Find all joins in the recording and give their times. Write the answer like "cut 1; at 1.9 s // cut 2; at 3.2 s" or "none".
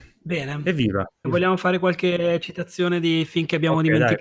cut 1; at 1.2 s